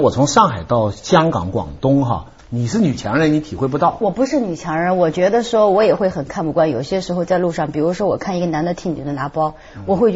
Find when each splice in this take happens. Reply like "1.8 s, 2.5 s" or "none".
2.4 s